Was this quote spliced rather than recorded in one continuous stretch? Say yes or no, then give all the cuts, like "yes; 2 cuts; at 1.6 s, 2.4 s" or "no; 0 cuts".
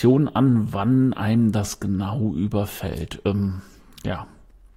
no; 0 cuts